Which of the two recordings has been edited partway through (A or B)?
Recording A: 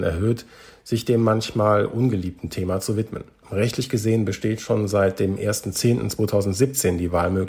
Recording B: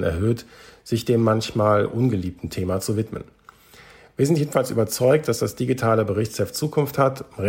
A